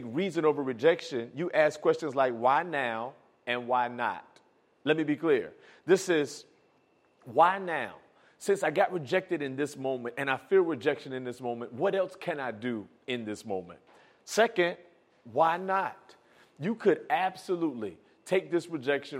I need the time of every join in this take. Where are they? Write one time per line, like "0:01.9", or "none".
none

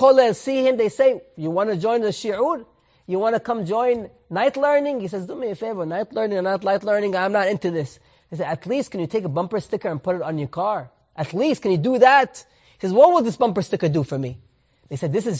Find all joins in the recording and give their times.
none

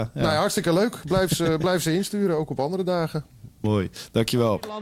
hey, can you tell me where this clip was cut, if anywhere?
none

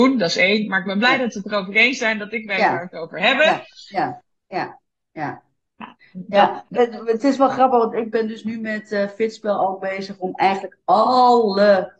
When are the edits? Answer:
0:04.4

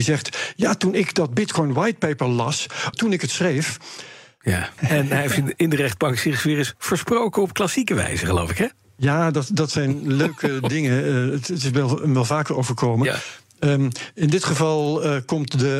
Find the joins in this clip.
0:02.9
0:04.8

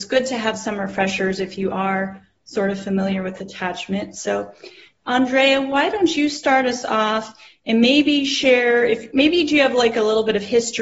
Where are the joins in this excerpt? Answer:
none

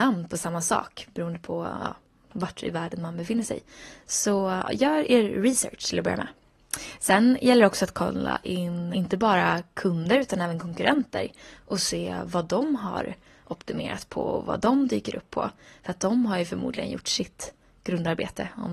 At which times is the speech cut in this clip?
0:08.9

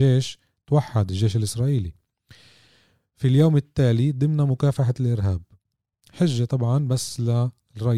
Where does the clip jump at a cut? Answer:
none

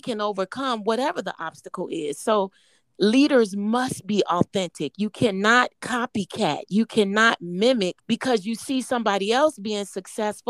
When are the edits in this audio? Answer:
0:05.7
0:08.0

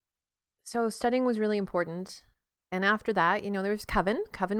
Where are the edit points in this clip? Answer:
none

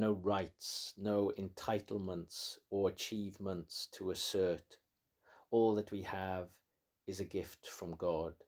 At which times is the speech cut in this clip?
none

